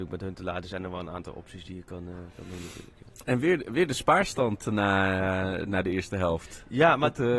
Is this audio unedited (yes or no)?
yes